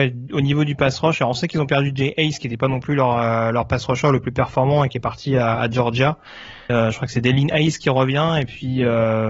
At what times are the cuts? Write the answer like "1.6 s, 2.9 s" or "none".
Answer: 6.7 s